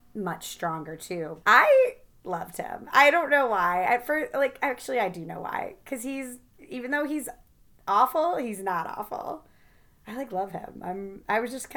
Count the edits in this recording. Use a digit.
2